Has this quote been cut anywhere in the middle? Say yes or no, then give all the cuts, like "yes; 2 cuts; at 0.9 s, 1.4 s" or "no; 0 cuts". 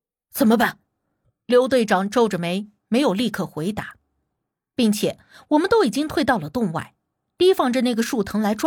yes; 1 cut; at 1.2 s